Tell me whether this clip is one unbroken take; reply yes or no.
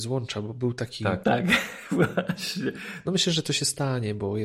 no